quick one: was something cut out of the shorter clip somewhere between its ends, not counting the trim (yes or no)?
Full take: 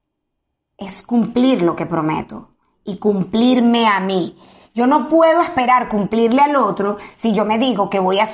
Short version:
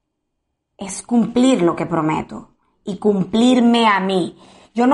no